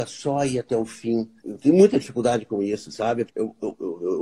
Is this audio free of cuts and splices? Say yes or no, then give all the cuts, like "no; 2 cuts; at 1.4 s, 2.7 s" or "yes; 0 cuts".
no; 2 cuts; at 1.4 s, 3.3 s